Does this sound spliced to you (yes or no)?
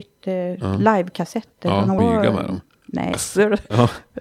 yes